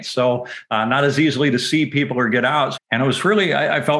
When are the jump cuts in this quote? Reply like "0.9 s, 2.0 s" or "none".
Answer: 2.8 s

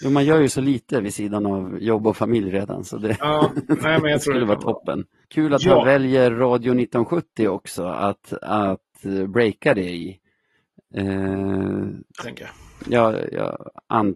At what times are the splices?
5.2 s, 12.2 s

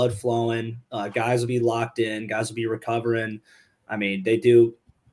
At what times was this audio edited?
none

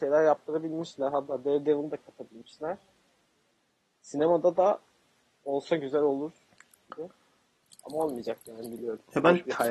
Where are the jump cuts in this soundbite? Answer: none

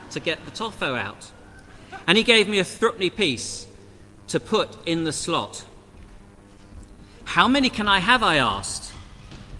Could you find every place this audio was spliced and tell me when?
2.0 s

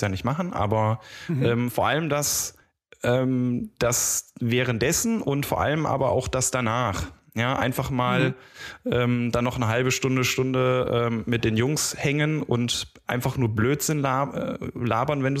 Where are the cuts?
none

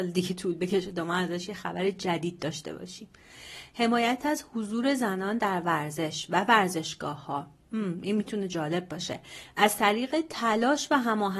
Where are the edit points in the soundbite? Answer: none

